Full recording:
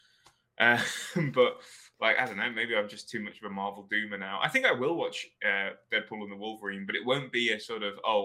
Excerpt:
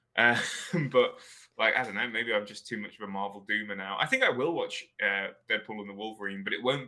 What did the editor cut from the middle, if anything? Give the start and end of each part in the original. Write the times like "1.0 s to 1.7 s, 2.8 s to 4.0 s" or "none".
none